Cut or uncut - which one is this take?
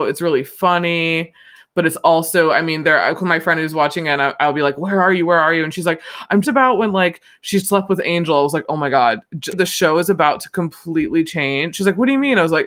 cut